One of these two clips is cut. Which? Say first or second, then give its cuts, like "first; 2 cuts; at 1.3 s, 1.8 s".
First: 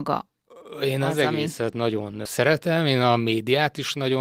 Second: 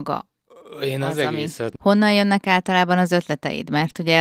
second; 1 cut; at 1.8 s